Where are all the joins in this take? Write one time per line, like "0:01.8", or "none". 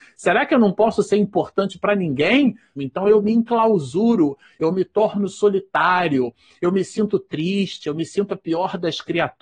0:02.8